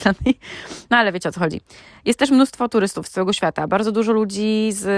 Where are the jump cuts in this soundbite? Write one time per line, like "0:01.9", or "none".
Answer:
none